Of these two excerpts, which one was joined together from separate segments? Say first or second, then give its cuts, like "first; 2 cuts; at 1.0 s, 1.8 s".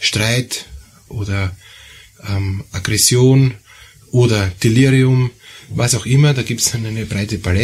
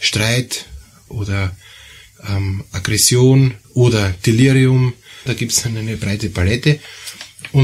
second; 2 cuts; at 3.6 s, 5.3 s